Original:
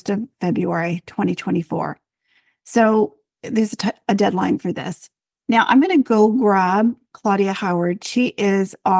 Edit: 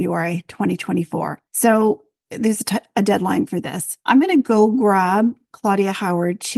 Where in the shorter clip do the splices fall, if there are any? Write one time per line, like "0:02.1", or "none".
0:01.5
0:04.1